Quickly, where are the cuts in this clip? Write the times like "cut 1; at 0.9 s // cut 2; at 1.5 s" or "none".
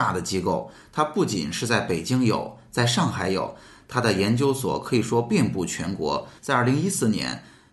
cut 1; at 6.4 s